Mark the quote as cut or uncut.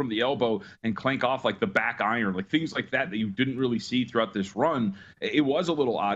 uncut